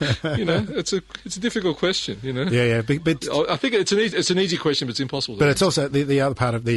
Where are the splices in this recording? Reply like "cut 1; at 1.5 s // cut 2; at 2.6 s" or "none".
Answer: none